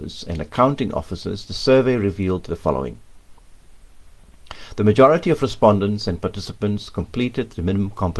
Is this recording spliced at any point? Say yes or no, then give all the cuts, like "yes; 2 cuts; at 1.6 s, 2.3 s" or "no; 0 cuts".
no; 0 cuts